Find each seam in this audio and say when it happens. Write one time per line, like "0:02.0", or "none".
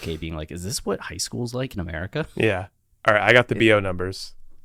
none